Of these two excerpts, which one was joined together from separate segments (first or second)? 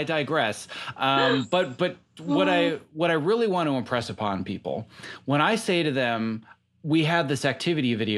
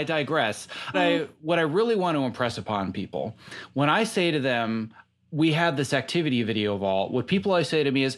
second